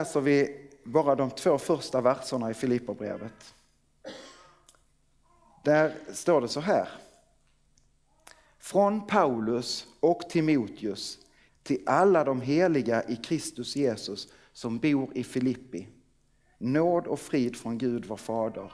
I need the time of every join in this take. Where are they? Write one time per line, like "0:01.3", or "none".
0:11.5
0:16.5